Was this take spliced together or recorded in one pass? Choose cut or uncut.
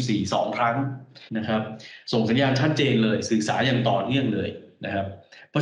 cut